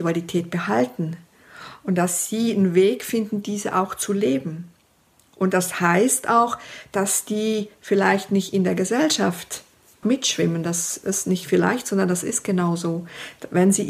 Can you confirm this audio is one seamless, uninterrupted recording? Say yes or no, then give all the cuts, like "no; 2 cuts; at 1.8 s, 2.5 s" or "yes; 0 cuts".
no; 1 cut; at 10.0 s